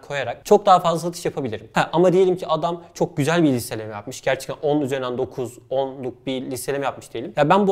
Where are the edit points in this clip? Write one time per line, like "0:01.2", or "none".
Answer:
none